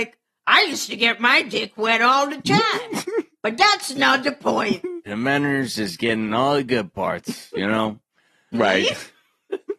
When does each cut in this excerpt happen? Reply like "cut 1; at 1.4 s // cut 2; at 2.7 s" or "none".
cut 1; at 5.1 s // cut 2; at 8.5 s